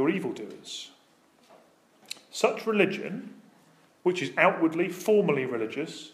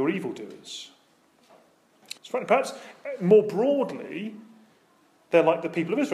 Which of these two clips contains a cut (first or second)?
second